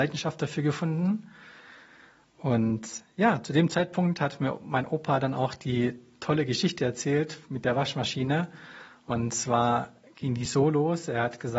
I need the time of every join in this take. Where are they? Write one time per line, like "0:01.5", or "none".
none